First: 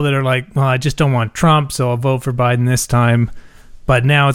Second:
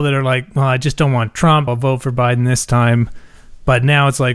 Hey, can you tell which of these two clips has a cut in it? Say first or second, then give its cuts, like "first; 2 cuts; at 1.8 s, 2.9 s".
second; 1 cut; at 1.7 s